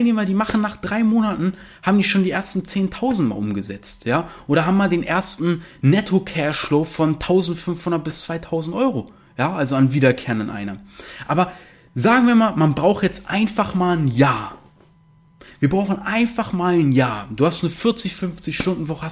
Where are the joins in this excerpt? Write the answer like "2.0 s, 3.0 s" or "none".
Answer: none